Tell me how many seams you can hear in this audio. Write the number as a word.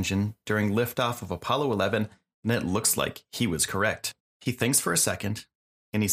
one